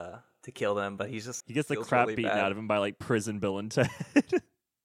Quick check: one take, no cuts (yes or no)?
no